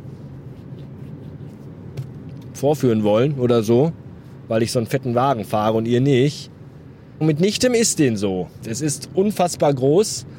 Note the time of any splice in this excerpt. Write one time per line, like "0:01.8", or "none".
0:07.2
0:08.6